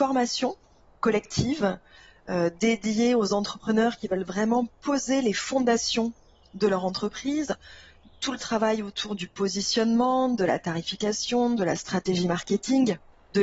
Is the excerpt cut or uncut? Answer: uncut